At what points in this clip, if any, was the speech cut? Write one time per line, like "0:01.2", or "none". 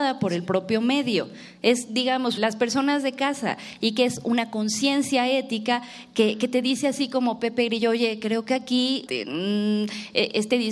0:02.4
0:09.1